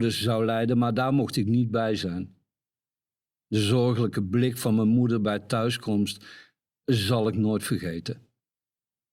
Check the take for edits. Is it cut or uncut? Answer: uncut